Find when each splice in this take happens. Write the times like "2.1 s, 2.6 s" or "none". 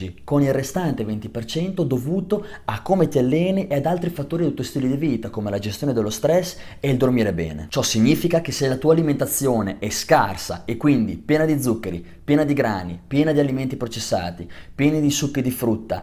none